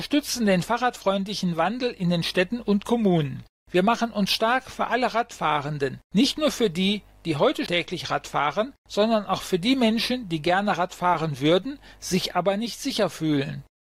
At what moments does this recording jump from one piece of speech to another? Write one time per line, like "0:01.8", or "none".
0:07.7